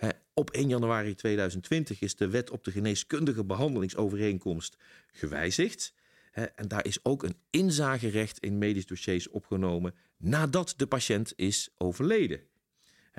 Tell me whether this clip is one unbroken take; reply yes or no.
yes